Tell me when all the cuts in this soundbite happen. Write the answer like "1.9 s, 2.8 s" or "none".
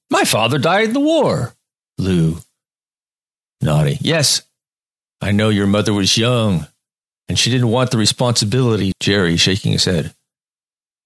8.9 s